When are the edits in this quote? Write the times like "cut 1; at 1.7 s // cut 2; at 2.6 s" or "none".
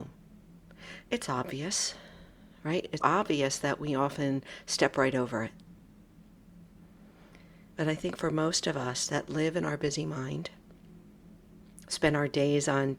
cut 1; at 1.0 s // cut 2; at 3.0 s // cut 3; at 7.7 s